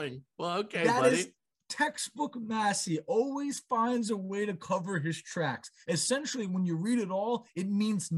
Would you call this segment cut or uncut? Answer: uncut